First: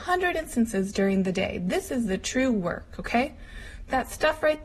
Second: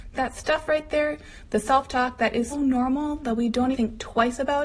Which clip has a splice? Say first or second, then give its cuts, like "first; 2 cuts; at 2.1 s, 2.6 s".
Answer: second; 3 cuts; at 1.5 s, 2.5 s, 3.7 s